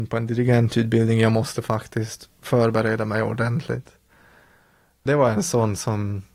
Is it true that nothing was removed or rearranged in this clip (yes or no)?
yes